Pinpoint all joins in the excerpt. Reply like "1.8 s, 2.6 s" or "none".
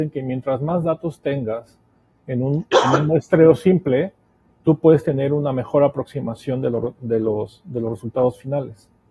2.7 s